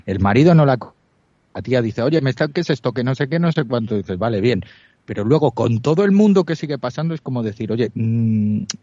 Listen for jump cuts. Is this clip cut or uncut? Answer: uncut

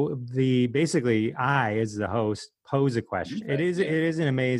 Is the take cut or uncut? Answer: cut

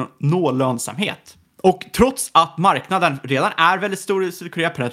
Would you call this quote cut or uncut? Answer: uncut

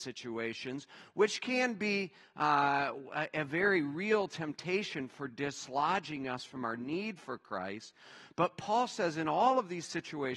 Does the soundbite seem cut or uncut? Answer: uncut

